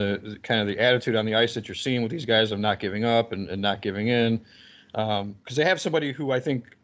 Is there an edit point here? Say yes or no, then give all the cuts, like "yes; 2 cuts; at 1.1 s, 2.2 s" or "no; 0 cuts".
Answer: no; 0 cuts